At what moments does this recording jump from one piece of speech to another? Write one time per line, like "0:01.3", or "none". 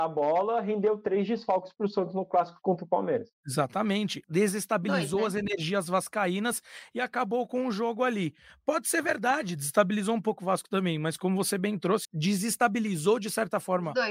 0:04.2
0:12.0